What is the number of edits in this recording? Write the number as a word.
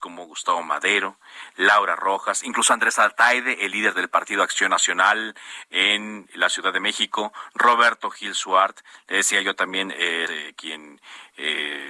one